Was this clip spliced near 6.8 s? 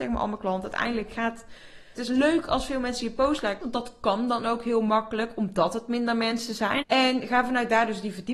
yes; 3 cuts; at 2.0 s, 3.6 s, 6.8 s

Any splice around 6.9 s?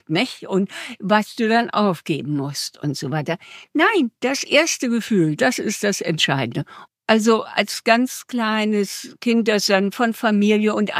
yes; 1 cut; at 6.9 s

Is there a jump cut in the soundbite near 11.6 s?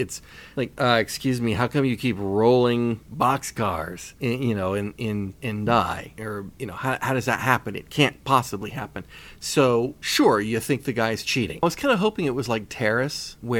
yes; 1 cut; at 11.6 s

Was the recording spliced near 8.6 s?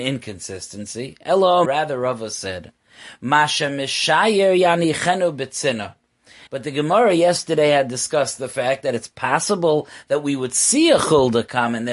no; 2 cuts; at 1.6 s, 6.5 s

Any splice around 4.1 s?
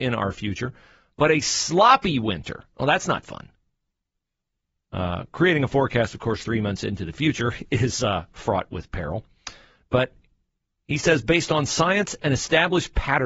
no; 0 cuts

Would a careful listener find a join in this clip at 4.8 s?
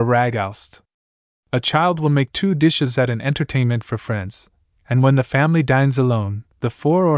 no; 1 cut; at 1.3 s

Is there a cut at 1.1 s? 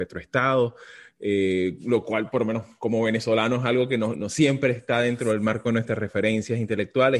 no; 1 cut; at 4.2 s

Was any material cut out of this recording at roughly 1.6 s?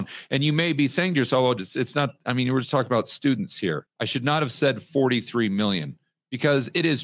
yes; 2 cuts; at 1.6 s, 3.9 s

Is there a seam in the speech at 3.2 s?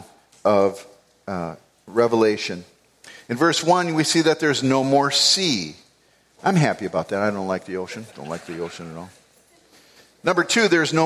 no; 1 cut; at 8.1 s

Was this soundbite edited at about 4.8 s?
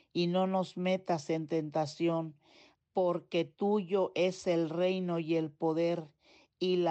no; 1 cut; at 2.8 s

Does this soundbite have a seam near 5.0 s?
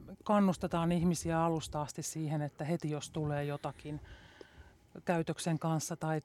no; 0 cuts

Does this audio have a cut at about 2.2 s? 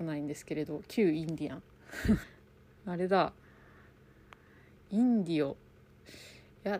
yes; 1 cut; at 2.2 s

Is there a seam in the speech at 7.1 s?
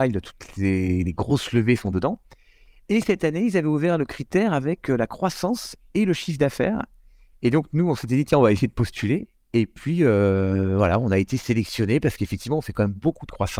no; 0 cuts

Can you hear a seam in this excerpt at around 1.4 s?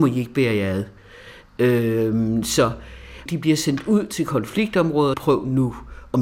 no; 2 cuts; at 3.3 s, 5.1 s

